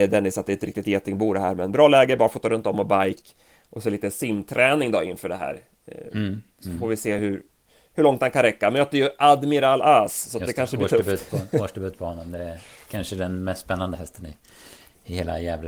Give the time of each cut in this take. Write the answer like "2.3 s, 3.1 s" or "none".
none